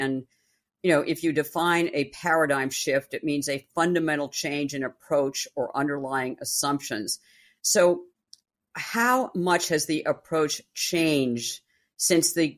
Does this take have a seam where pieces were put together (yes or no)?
no